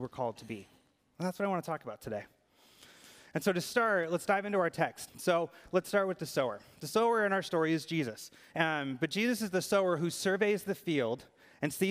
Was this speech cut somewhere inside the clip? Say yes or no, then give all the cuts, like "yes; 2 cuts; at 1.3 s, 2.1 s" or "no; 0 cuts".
yes; 2 cuts; at 5.1 s, 8.5 s